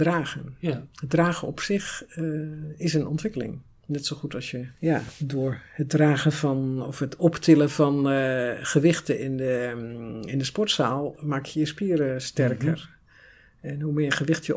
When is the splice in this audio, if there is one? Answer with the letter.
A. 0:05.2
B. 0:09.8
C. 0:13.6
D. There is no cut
D